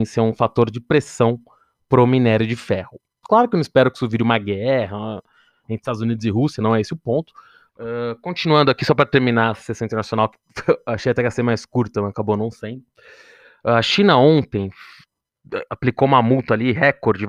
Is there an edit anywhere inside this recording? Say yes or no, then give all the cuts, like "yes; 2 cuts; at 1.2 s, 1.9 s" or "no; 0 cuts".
yes; 2 cuts; at 3.2 s, 7.7 s